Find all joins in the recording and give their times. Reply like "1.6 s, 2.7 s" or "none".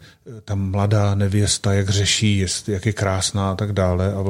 none